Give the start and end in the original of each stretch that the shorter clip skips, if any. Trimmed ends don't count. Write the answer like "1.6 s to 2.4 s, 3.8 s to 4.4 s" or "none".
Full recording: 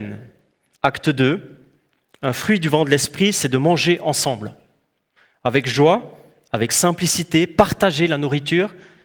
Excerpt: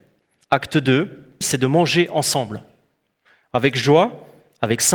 1.7 s to 3.3 s